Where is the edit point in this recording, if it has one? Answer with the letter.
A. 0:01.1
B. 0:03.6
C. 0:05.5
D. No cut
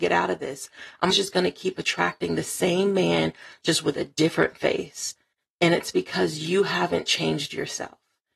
A